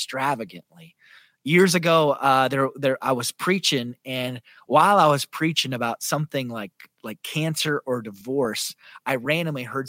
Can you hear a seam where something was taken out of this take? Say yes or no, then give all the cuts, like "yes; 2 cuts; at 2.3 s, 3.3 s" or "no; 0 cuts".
no; 0 cuts